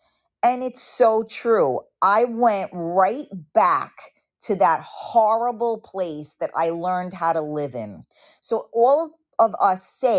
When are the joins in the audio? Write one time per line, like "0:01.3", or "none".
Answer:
none